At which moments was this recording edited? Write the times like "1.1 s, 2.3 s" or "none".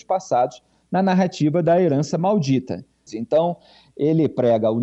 3.1 s